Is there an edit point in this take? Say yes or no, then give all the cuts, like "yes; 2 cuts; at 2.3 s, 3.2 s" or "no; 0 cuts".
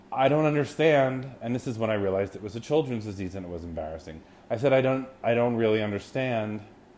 no; 0 cuts